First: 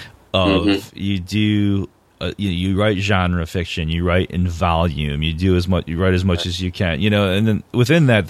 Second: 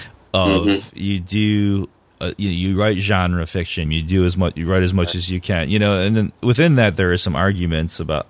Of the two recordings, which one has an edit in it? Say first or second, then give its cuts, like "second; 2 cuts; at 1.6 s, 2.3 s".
second; 1 cut; at 3.9 s